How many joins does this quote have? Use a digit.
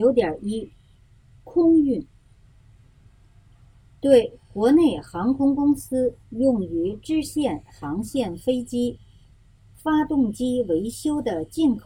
1